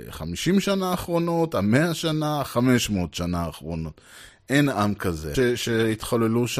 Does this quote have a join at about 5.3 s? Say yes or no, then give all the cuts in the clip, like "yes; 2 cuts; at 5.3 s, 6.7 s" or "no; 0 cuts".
yes; 1 cut; at 5.3 s